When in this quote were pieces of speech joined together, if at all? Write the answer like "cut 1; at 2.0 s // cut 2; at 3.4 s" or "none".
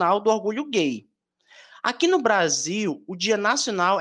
none